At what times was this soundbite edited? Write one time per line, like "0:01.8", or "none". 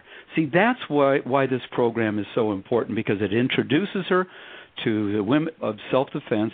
0:05.6